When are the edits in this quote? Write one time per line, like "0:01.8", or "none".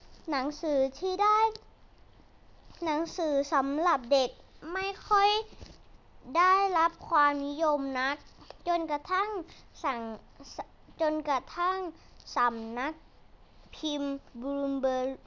0:14.3